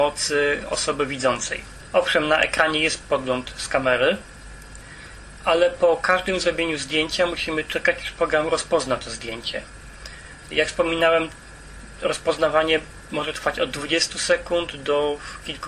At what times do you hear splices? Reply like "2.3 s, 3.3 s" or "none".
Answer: 3.0 s, 10.5 s